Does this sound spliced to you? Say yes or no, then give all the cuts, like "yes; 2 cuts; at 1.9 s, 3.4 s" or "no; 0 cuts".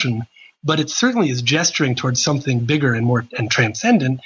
no; 0 cuts